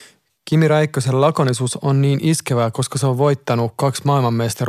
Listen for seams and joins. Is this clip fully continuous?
yes; 0 cuts

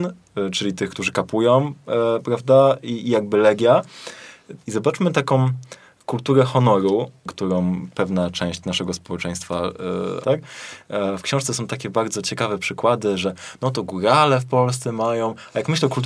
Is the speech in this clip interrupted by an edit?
yes; 2 cuts; at 4.6 s, 10.2 s

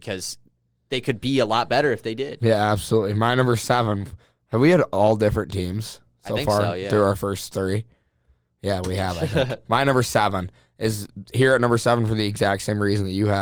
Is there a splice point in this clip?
no; 0 cuts

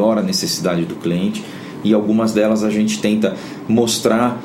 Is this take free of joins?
yes; 0 cuts

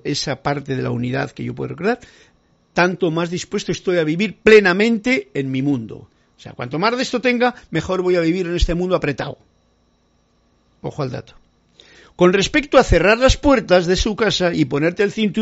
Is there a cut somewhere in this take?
no; 0 cuts

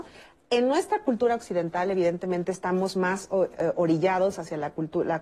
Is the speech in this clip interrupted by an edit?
no; 0 cuts

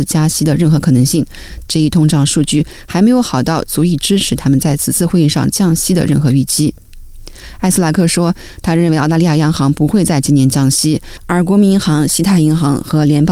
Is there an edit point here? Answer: yes; 1 cut; at 1.7 s

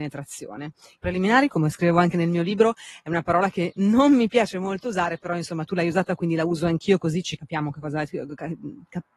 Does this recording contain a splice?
yes; 2 cuts; at 1.0 s, 7.4 s

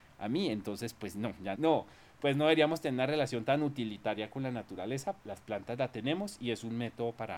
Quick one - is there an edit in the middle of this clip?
yes; 2 cuts; at 1.6 s, 5.2 s

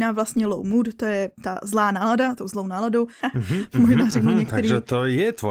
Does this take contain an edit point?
yes; 1 cut; at 3.2 s

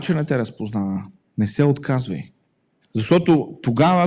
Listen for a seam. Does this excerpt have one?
yes; 1 cut; at 2.8 s

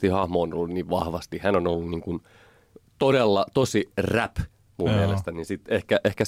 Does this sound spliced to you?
no; 0 cuts

